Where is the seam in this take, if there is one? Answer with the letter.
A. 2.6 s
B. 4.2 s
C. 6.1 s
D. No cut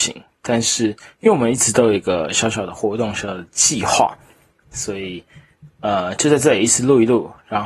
D